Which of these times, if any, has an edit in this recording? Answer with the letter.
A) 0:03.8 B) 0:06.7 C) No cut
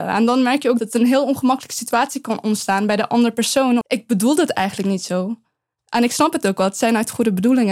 A